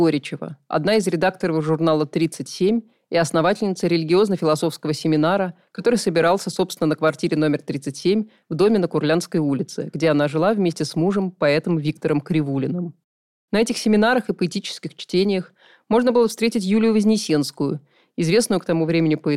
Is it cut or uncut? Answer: uncut